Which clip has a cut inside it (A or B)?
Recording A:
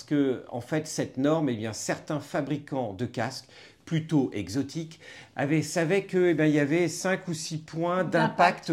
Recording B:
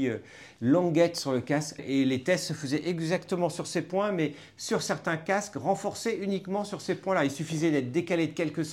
B